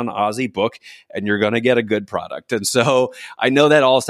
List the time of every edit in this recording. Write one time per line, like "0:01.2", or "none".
none